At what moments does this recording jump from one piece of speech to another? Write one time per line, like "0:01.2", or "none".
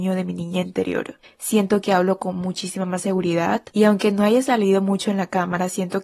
0:01.2